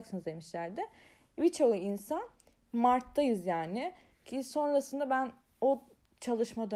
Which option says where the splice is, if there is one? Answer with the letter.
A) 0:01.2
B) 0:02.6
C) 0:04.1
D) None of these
C